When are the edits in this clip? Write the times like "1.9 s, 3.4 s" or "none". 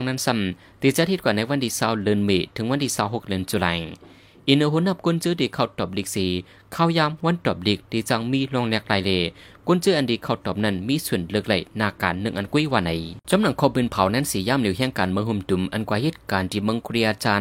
13.2 s